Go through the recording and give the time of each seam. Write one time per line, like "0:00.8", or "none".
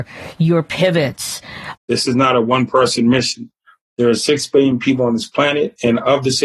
0:01.7